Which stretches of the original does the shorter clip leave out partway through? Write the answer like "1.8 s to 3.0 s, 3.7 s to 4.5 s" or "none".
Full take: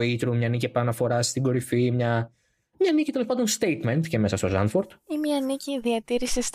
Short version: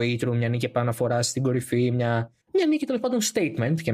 2.4 s to 2.7 s